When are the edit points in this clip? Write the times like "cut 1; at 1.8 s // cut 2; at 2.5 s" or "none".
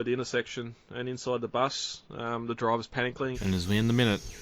cut 1; at 3.3 s